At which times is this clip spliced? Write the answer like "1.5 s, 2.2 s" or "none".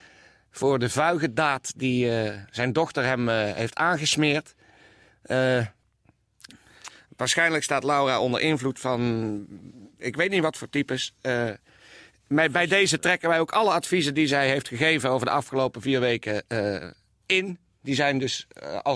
none